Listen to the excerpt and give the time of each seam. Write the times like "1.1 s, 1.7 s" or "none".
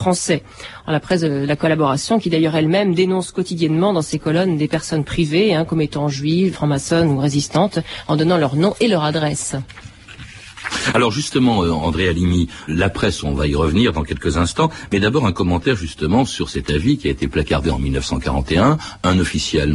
6.5 s, 12.7 s

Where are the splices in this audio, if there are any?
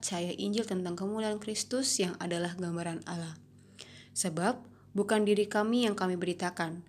none

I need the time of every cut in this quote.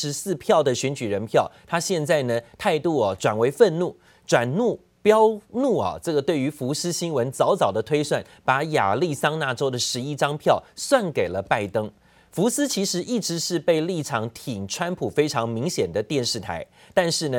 none

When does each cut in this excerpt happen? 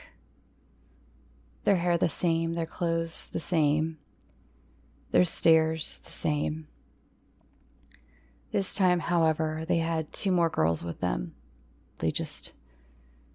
12.0 s

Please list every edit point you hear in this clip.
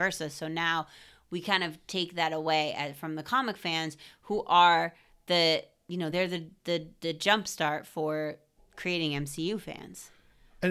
none

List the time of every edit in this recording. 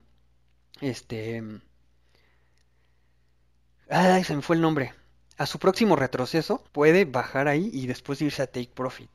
6.7 s

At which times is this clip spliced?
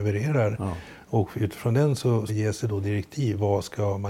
2.3 s

